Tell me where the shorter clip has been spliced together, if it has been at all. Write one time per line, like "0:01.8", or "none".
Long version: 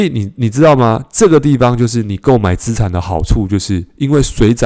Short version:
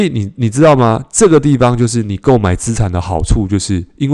none